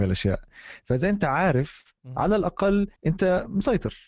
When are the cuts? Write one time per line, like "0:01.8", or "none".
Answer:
0:03.0